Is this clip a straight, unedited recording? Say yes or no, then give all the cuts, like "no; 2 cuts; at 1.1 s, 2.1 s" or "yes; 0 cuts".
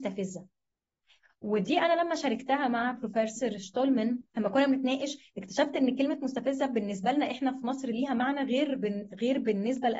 no; 1 cut; at 4.3 s